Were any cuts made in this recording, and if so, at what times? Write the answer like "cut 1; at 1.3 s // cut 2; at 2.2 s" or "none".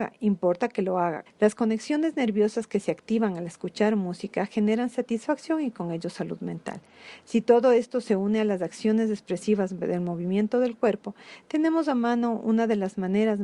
cut 1; at 1.3 s

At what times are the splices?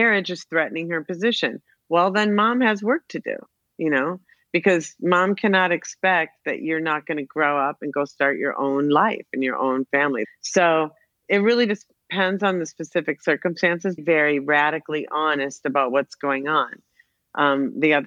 cut 1; at 10.2 s // cut 2; at 14.0 s

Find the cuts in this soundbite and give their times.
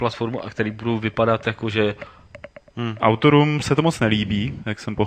cut 1; at 3.0 s

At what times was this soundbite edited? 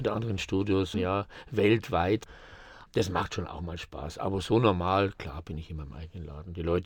cut 1; at 0.9 s

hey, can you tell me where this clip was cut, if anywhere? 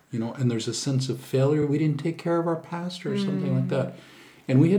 none

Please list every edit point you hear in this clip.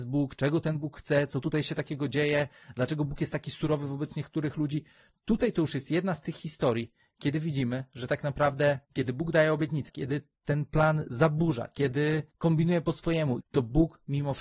cut 1; at 9.9 s // cut 2; at 13.4 s

